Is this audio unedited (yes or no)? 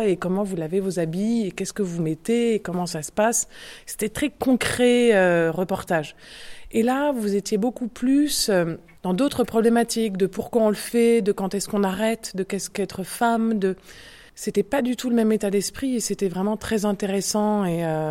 yes